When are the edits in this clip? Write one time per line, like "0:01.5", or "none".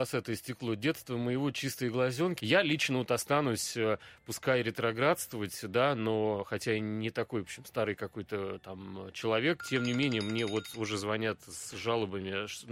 0:02.4
0:09.6